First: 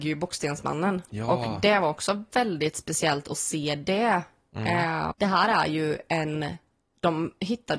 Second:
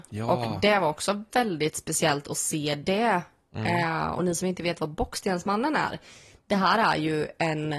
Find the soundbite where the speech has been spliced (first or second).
first